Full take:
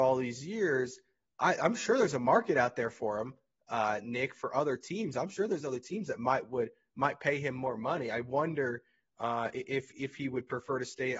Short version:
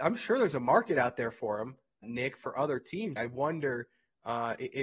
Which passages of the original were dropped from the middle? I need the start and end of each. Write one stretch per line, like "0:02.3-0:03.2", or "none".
0:03.6-0:04.0
0:05.1-0:08.1